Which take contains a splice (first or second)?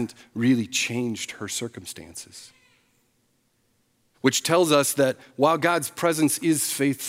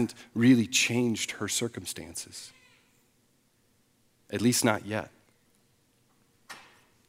first